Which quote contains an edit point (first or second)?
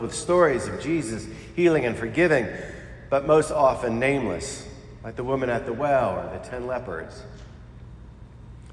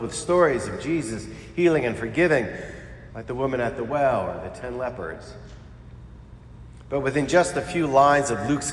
second